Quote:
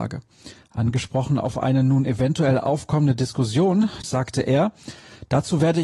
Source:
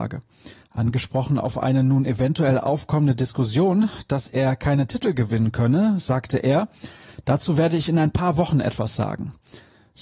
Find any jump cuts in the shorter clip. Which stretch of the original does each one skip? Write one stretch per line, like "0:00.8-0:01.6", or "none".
0:04.0-0:06.0